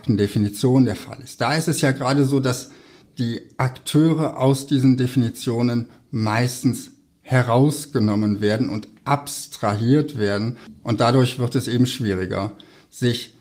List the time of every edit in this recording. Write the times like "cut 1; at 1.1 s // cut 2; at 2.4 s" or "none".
none